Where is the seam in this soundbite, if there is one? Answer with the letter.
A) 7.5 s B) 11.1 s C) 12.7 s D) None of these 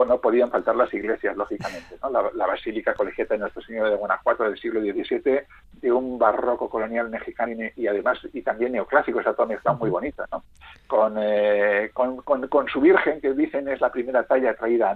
D